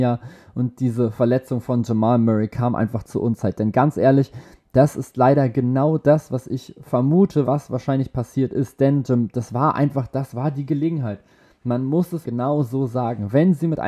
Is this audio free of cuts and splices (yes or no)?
no